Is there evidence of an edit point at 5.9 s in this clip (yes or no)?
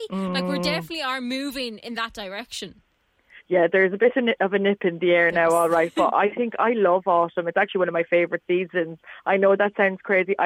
no